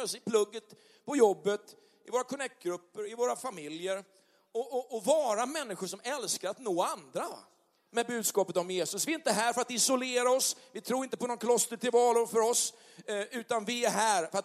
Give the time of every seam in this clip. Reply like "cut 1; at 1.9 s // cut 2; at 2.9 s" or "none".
none